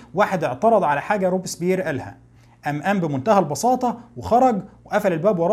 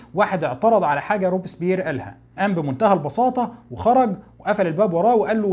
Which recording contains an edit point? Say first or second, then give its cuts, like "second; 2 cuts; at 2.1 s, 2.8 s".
second; 1 cut; at 2.4 s